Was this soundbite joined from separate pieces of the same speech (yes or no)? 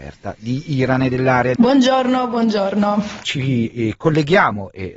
yes